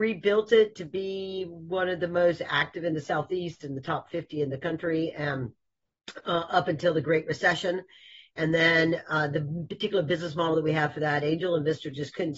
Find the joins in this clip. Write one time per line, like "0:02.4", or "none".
none